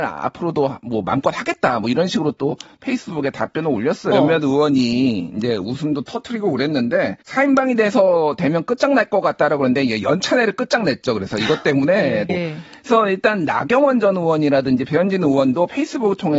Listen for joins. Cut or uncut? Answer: cut